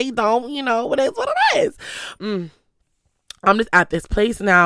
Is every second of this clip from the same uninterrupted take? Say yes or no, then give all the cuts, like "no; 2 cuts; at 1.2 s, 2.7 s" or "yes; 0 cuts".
no; 1 cut; at 2.2 s